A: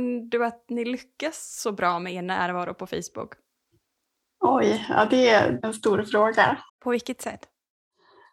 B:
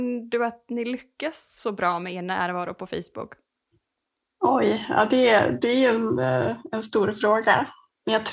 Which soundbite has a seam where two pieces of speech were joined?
A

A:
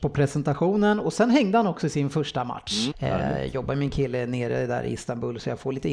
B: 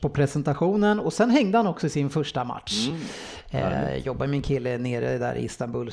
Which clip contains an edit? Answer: A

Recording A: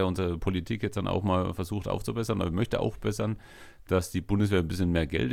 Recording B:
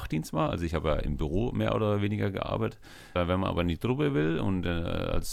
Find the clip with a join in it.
B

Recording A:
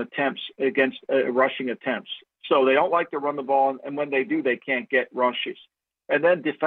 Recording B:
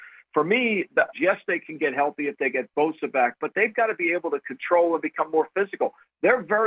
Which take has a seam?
B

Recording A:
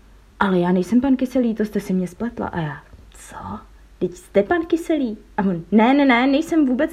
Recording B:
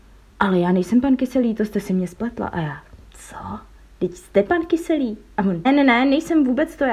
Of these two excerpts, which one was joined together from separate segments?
B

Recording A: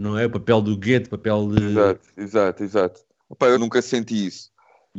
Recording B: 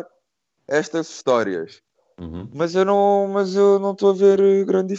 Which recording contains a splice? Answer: A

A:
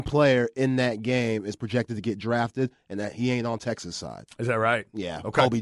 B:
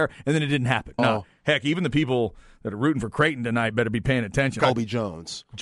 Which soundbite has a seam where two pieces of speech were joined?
B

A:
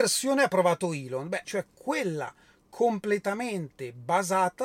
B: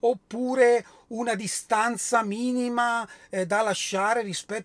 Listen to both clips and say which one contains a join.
A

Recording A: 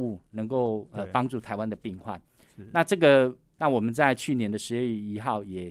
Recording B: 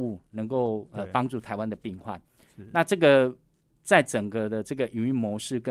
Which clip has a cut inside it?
A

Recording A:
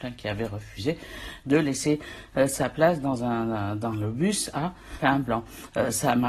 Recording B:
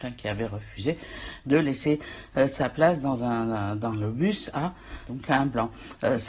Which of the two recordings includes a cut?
A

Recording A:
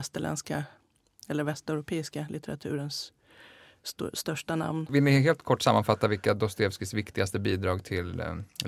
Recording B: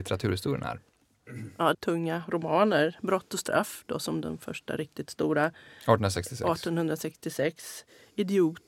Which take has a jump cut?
B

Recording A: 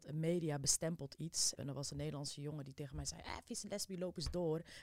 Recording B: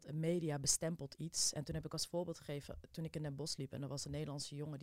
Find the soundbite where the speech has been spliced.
A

